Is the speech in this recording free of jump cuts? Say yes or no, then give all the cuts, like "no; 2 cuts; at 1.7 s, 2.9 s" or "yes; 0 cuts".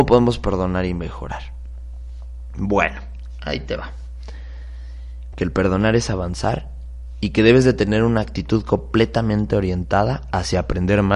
no; 1 cut; at 5.3 s